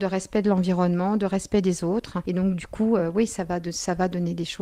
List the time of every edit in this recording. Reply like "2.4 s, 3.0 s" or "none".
none